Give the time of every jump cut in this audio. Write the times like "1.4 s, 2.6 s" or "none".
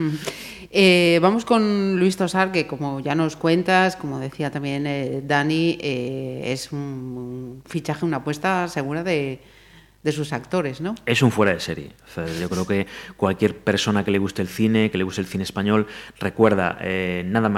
none